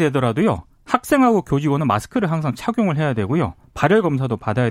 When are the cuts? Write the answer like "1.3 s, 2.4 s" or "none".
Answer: none